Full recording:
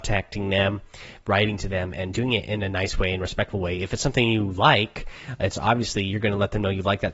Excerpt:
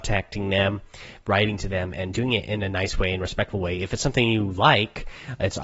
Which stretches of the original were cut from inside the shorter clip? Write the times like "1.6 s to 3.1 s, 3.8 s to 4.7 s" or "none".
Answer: none

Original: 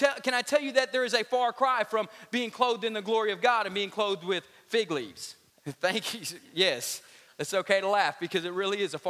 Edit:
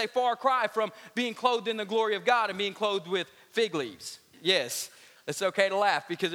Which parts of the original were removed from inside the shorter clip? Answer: 5.5 s to 6.4 s

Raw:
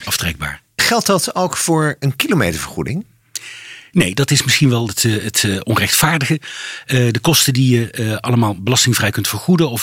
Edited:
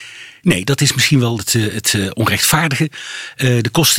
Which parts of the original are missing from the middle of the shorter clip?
none

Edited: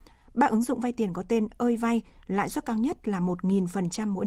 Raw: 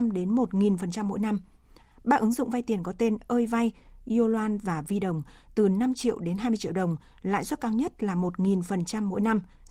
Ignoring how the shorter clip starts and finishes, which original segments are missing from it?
3.9 s to 7.1 s

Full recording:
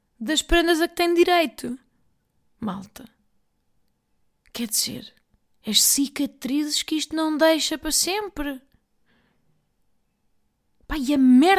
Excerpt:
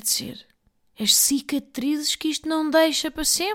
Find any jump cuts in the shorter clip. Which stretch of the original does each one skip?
none

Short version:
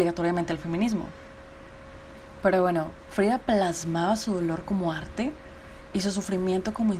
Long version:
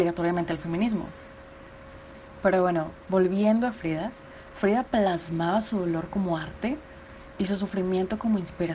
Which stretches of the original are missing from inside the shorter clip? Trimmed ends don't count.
3.1 s to 4.5 s

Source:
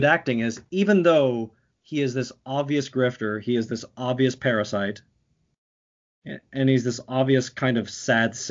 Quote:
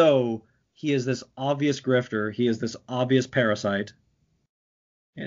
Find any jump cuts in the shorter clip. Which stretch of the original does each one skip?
none

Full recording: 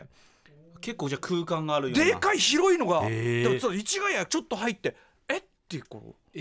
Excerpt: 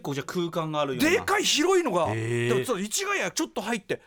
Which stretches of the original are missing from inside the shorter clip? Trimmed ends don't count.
none

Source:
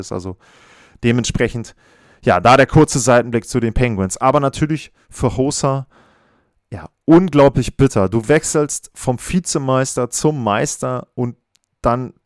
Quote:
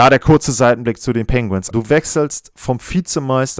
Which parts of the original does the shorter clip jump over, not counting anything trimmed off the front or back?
4.2 s to 8.1 s

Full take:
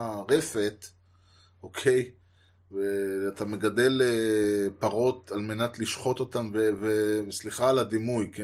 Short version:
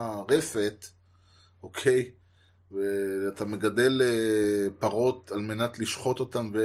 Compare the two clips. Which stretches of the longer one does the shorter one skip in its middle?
none

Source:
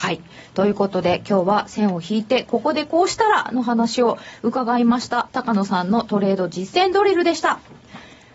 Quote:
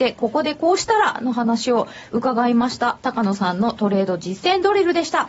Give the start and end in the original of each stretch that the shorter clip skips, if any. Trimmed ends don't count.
none

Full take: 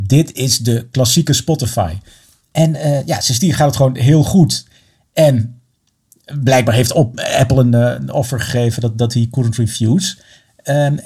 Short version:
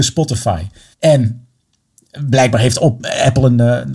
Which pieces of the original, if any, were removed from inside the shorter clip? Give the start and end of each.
2.2 s to 5.1 s

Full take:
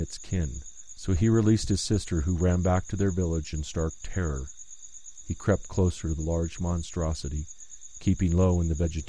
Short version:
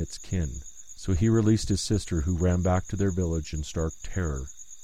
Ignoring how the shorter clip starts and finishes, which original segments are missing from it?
none

